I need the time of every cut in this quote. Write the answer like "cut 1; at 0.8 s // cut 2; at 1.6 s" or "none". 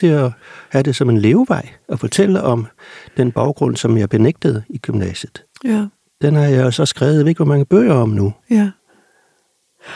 none